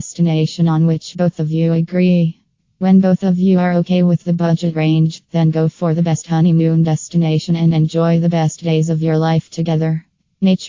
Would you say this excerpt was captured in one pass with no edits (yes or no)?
yes